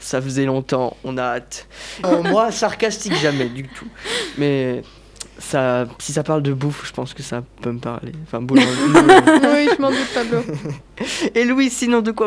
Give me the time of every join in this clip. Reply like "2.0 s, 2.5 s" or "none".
2.0 s